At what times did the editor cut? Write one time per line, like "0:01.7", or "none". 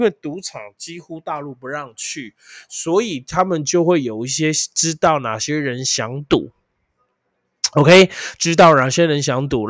none